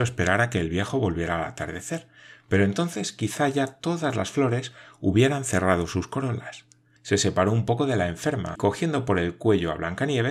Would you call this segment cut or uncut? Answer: cut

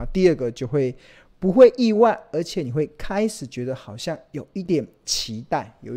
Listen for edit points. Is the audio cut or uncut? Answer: cut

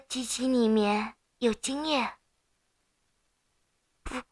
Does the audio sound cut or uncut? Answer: uncut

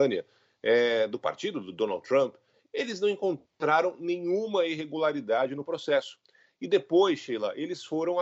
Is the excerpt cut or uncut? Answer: uncut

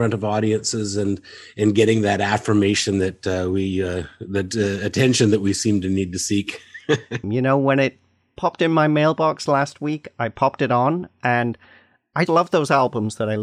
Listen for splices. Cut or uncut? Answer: cut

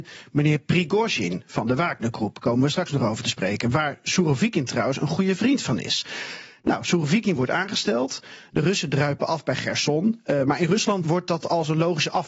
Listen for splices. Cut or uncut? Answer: cut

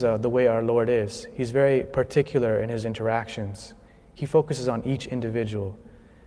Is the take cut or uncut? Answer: uncut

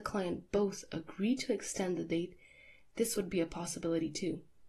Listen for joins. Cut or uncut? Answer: uncut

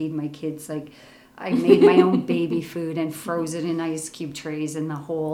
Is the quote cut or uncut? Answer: uncut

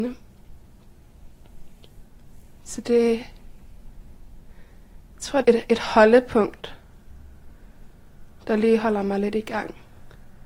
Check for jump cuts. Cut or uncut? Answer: cut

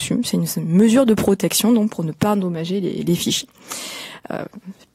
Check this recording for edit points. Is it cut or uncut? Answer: uncut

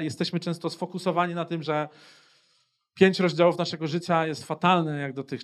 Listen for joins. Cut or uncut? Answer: uncut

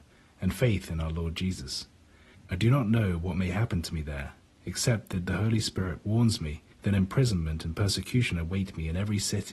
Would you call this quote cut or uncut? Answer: cut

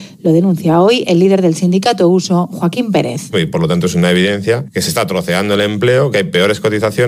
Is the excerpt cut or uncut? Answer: cut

